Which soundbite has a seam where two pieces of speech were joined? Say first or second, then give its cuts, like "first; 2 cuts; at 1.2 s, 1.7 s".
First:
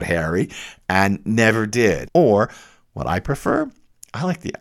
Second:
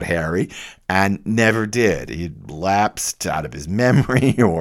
first; 1 cut; at 2.1 s